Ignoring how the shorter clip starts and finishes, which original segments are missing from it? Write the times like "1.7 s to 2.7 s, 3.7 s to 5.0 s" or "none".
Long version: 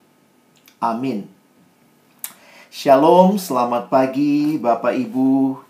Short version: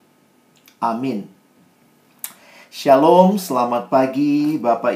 none